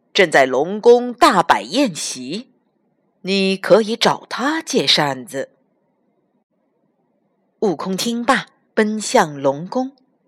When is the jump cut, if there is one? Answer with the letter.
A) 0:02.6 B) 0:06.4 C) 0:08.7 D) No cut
C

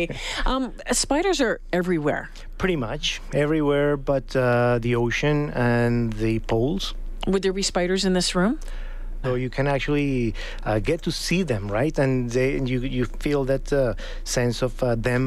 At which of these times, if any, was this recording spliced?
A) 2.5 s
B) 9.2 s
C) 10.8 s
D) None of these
B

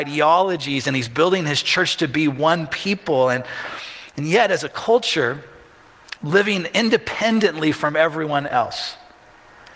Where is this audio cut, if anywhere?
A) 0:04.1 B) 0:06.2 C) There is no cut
B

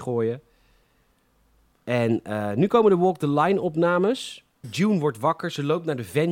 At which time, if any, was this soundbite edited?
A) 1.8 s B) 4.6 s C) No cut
B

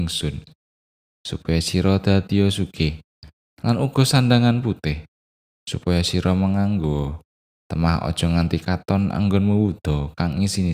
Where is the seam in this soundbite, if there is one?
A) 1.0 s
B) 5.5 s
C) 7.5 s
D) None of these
D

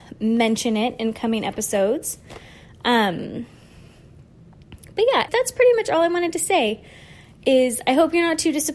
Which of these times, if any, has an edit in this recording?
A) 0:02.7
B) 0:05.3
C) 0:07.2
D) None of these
B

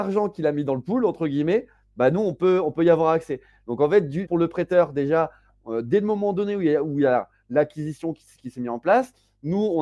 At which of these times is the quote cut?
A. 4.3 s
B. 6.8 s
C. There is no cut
A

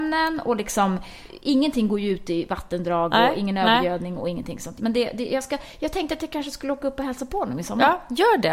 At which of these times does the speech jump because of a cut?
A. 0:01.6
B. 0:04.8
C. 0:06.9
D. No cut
B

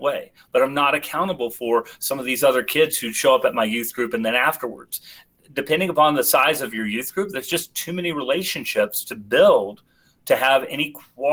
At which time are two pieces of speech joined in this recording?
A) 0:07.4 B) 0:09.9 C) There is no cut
C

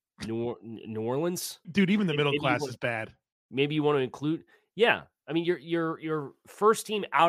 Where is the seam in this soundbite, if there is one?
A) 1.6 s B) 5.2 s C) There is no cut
A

